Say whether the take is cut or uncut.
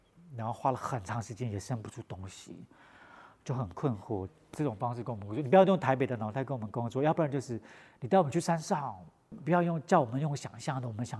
cut